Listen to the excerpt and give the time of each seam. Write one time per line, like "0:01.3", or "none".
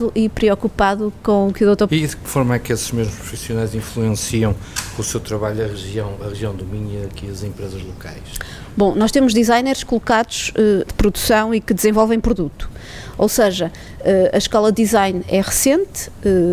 0:01.9
0:10.9